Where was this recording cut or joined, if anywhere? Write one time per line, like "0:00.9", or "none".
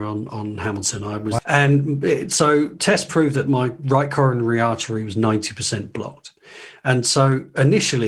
0:01.4